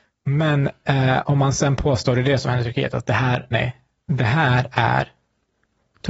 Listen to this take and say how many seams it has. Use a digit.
1